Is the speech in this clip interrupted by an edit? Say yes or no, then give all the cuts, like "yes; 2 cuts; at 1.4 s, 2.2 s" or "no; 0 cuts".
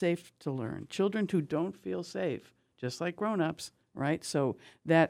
yes; 1 cut; at 3.8 s